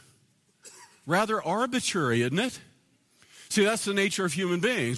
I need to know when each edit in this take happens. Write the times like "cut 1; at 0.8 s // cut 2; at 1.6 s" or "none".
none